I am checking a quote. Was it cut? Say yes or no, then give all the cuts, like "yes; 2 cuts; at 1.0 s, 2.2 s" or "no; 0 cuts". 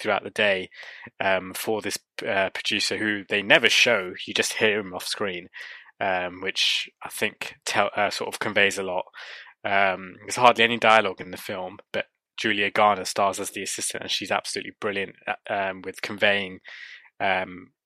no; 0 cuts